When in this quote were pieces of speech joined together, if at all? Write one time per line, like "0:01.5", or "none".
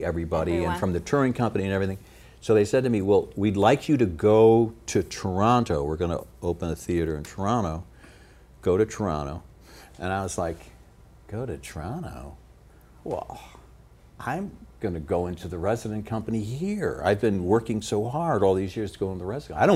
none